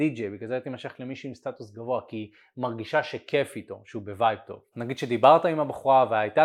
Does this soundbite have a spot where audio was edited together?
yes; 1 cut; at 4.7 s

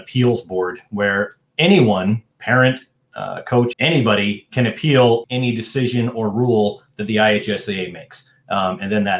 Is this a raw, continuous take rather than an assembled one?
no; 3 cuts; at 2.3 s, 3.7 s, 5.2 s

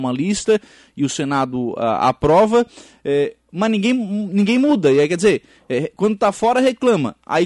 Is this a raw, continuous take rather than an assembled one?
yes; 0 cuts

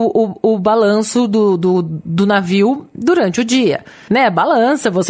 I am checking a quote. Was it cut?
yes; 1 cut; at 4.1 s

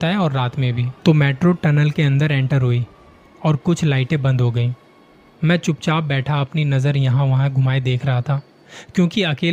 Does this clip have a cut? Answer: yes; 1 cut; at 1.0 s

